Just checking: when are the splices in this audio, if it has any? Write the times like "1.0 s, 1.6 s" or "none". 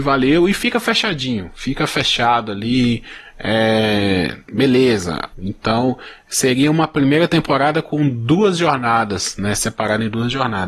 5.3 s